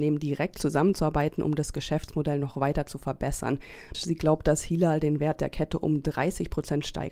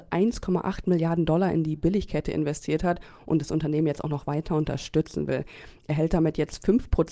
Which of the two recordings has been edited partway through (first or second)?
first